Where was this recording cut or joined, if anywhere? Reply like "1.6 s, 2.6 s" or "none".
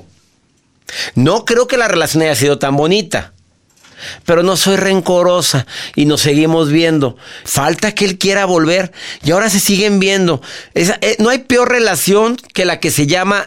7.4 s